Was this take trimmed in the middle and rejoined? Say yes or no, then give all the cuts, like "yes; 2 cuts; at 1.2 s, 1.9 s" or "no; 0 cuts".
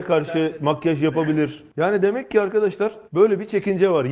yes; 1 cut; at 3.1 s